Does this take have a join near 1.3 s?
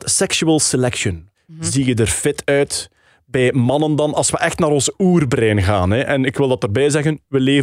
yes; 1 cut; at 1.3 s

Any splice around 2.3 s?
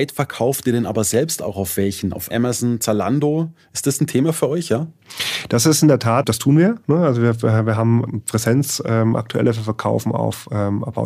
yes; 1 cut; at 2.3 s

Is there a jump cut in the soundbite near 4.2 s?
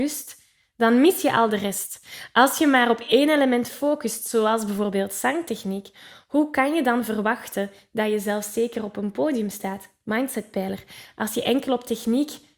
no; 0 cuts

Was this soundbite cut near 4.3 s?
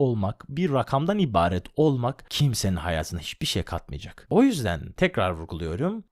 yes; 1 cut; at 4.3 s

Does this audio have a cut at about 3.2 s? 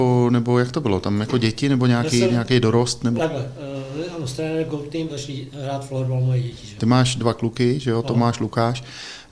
yes; 3 cuts; at 3.2 s, 5.1 s, 6.8 s

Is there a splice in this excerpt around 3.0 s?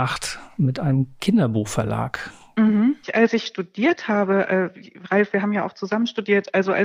yes; 1 cut; at 3.0 s

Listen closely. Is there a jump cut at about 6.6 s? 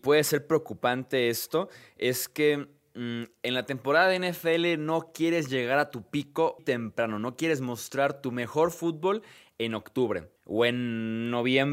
yes; 2 cuts; at 6.6 s, 10.4 s

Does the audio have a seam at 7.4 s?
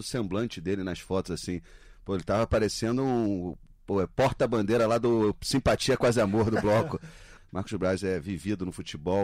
yes; 1 cut; at 7.4 s

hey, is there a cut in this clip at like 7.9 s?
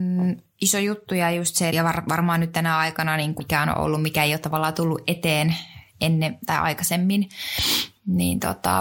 no; 2 cuts; at 1.7 s, 3.4 s

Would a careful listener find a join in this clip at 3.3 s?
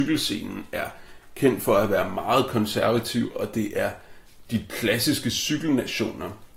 no; 0 cuts

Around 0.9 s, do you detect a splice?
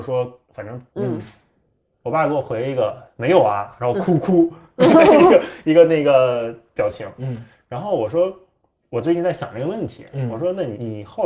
yes; 1 cut; at 0.9 s

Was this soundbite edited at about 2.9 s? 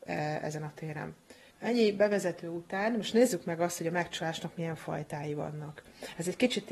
no; 1 cut; at 1.5 s

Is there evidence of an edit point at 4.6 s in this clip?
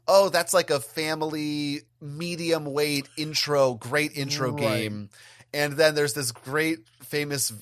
no; 0 cuts

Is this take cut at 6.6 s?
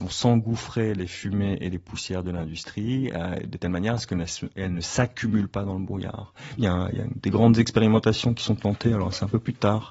yes; 1 cut; at 6.6 s

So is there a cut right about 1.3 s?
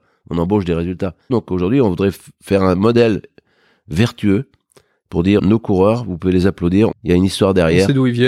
yes; 3 cuts; at 1.3 s, 5.4 s, 6.9 s

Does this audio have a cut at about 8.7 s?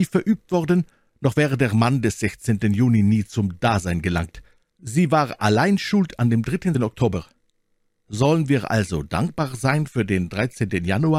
no; 1 cut; at 6.7 s

